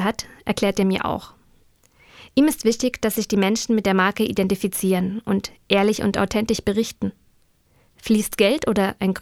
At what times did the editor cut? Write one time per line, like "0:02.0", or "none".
none